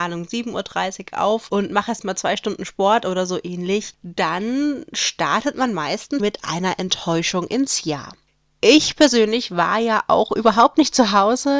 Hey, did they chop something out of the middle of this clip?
yes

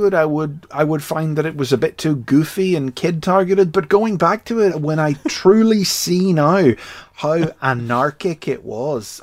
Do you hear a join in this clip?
yes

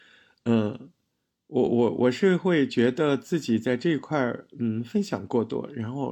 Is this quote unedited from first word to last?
yes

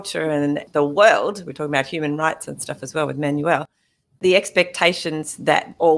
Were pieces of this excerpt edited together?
no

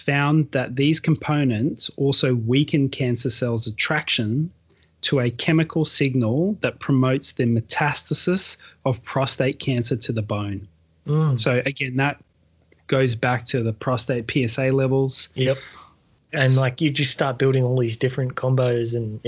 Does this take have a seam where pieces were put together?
yes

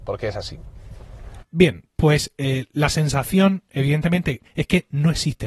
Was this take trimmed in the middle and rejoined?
yes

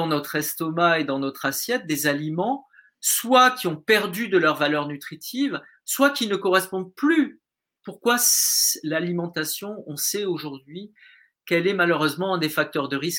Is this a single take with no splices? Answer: no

